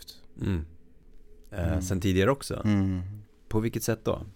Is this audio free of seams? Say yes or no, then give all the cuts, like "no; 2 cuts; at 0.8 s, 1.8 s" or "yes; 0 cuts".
no; 1 cut; at 1.5 s